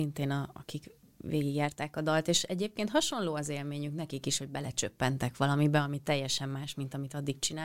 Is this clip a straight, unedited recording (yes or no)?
yes